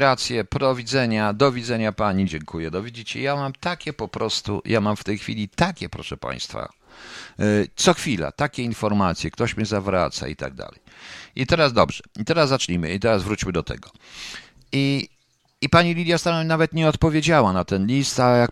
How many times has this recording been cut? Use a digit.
1